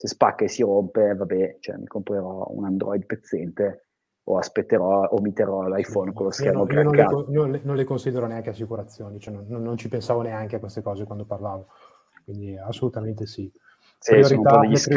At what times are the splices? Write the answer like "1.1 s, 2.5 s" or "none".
none